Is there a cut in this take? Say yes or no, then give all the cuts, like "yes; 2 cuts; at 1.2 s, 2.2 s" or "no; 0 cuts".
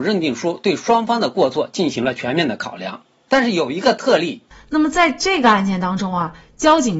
yes; 1 cut; at 4.5 s